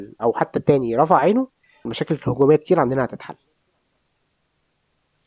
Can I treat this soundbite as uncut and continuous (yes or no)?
no